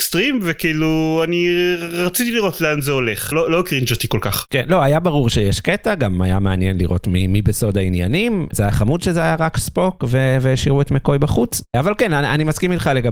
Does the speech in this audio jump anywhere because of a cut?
yes; 1 cut; at 3.3 s

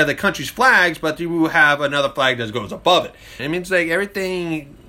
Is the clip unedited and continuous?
no; 1 cut; at 3.4 s

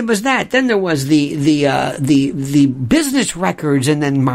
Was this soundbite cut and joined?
no; 0 cuts

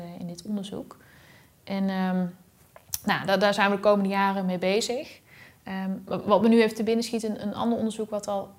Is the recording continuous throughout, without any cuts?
yes; 0 cuts

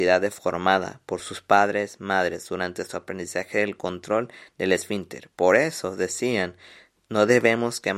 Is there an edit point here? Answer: no; 0 cuts

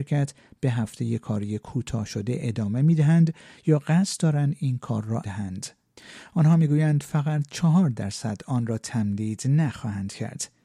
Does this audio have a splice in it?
yes; 1 cut; at 5.2 s

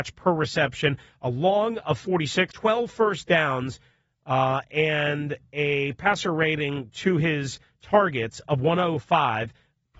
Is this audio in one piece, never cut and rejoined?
no; 1 cut; at 2.5 s

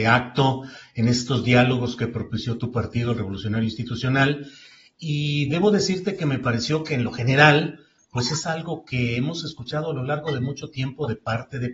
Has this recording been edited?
no; 0 cuts

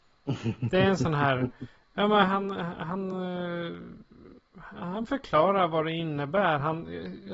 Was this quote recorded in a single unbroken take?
yes; 0 cuts

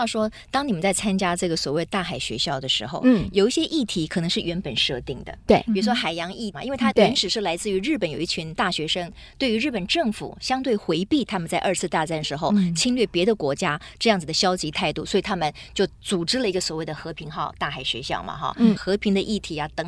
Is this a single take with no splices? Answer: no; 2 cuts; at 6.5 s, 18.8 s

